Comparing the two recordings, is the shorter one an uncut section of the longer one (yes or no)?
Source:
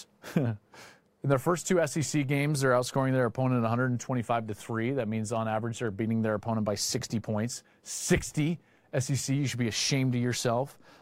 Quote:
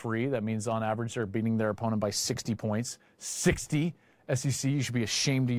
yes